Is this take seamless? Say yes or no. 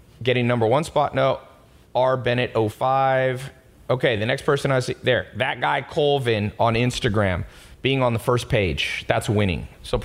yes